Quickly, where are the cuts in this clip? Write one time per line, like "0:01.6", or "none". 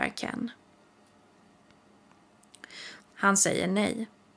0:03.0